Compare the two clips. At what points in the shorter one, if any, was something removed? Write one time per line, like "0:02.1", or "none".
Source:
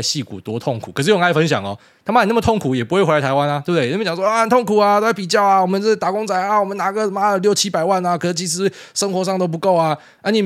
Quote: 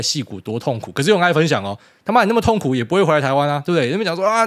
none